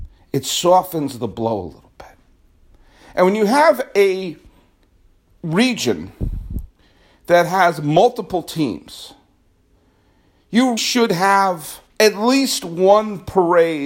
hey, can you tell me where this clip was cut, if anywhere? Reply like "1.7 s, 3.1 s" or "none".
10.8 s, 11.9 s